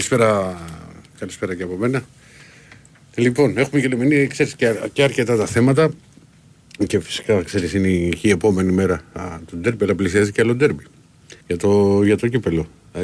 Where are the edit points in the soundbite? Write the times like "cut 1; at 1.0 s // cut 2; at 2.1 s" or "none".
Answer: cut 1; at 11.4 s